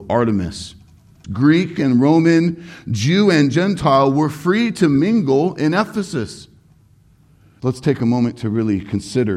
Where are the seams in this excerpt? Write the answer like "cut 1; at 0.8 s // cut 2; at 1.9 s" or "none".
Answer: cut 1; at 1.2 s // cut 2; at 7.6 s